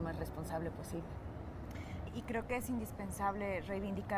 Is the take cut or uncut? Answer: cut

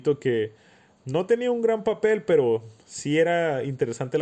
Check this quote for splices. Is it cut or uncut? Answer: cut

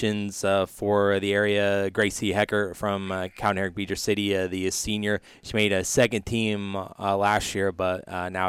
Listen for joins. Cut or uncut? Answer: uncut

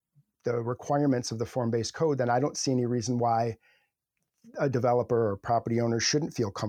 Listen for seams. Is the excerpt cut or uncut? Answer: uncut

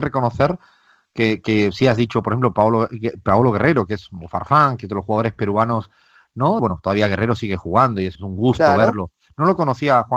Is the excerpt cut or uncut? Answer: cut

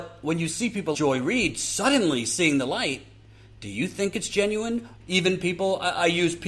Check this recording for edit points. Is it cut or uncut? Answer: cut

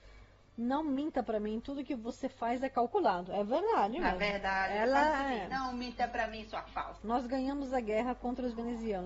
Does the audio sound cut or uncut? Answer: cut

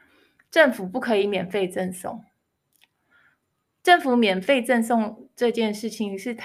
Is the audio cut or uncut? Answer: uncut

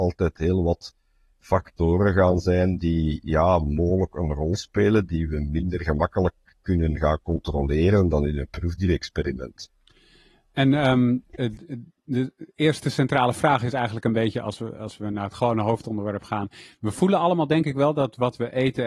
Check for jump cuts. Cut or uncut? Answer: uncut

